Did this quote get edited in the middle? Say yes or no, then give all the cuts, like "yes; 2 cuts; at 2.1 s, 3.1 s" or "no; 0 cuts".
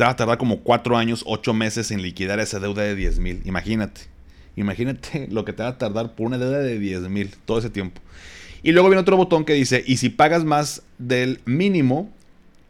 no; 0 cuts